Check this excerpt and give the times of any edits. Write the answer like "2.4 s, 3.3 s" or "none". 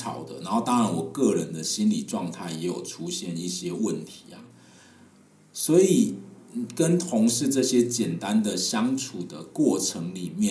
none